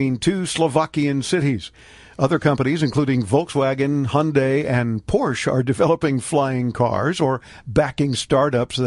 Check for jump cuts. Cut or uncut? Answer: uncut